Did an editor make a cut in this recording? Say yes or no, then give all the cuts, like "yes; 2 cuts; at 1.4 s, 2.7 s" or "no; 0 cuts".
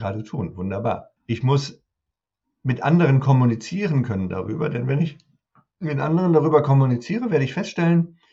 yes; 1 cut; at 1.2 s